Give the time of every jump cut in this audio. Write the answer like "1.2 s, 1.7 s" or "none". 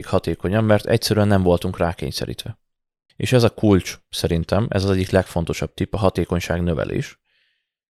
3.1 s